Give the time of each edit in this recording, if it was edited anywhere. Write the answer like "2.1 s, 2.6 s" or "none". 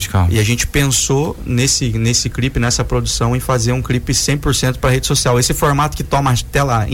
none